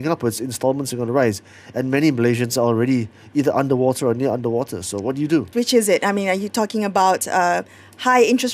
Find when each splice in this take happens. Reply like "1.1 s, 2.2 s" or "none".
5.5 s